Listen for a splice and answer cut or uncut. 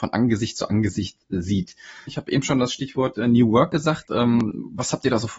cut